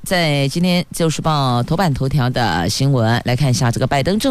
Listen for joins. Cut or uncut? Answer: uncut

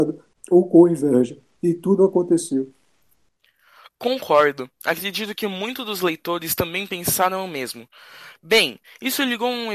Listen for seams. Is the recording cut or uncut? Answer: uncut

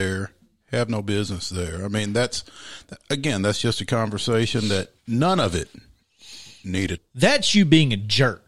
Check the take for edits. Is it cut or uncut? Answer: cut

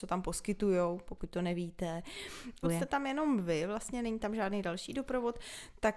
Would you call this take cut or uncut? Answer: cut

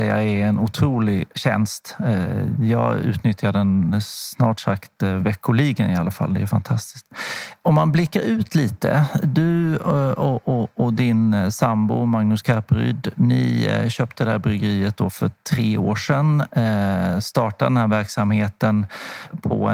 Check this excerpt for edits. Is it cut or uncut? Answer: uncut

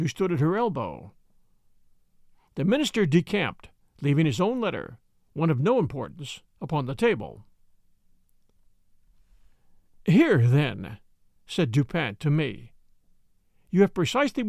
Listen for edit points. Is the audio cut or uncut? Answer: uncut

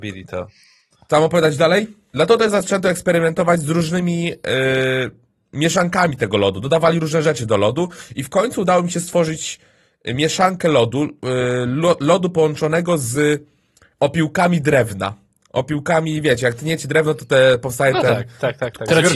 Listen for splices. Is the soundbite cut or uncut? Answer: cut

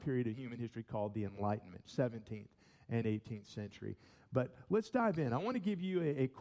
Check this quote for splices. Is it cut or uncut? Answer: uncut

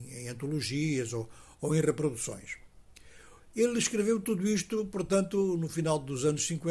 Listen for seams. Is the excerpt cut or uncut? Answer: uncut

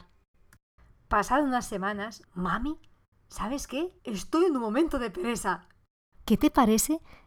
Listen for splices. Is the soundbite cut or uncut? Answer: cut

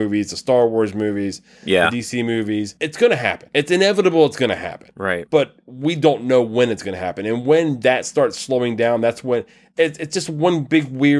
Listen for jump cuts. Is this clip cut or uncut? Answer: uncut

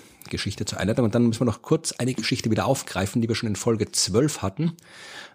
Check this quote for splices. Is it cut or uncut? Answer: uncut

